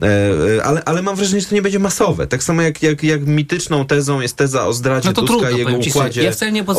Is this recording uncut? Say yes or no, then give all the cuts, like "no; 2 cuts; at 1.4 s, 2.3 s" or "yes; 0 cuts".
no; 1 cut; at 3.0 s